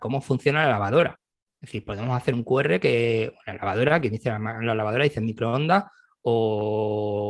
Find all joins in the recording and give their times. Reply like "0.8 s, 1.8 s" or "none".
6.1 s